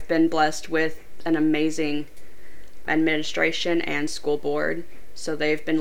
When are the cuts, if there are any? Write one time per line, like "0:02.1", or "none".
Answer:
0:02.9